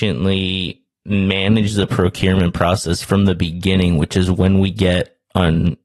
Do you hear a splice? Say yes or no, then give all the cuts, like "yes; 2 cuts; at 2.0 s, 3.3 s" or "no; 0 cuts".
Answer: no; 0 cuts